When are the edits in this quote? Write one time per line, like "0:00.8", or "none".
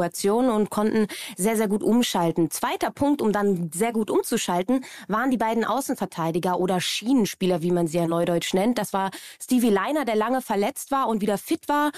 none